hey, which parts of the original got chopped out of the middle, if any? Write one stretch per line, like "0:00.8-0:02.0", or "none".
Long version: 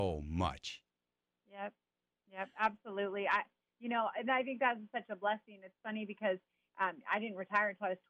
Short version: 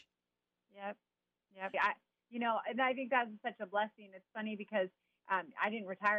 0:02.5-0:03.2